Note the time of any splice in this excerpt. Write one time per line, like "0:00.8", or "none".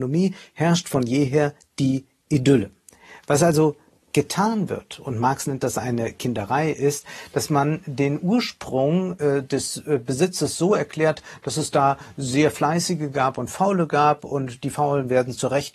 none

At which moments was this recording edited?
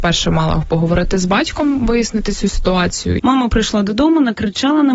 0:03.2

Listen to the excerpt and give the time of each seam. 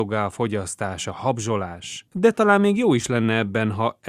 0:02.1

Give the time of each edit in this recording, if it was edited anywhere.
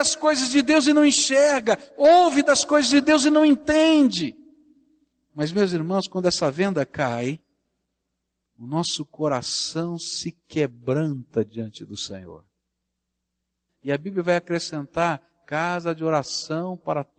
0:13.7

